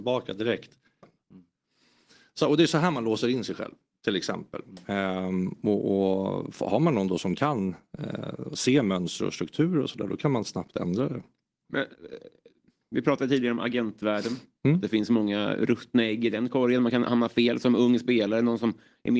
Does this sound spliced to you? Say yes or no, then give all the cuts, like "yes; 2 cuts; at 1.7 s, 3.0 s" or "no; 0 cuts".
yes; 1 cut; at 1.0 s